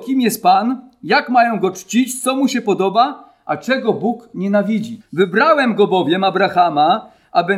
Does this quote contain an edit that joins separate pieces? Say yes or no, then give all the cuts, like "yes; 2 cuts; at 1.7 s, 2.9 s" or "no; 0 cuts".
yes; 1 cut; at 5.0 s